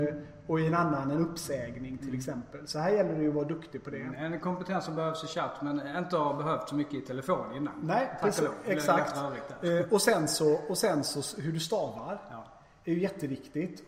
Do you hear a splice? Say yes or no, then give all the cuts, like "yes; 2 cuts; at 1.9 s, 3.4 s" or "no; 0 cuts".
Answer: no; 0 cuts